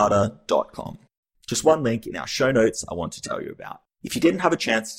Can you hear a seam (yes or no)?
no